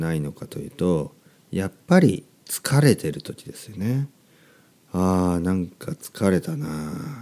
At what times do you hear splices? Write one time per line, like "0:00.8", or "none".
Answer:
none